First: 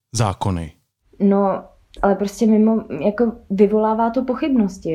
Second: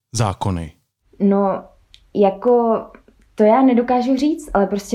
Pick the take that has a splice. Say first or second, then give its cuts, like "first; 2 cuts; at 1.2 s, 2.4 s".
first; 1 cut; at 2.0 s